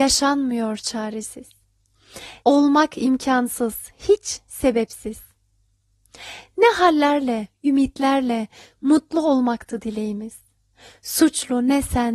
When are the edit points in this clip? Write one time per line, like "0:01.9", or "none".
0:02.4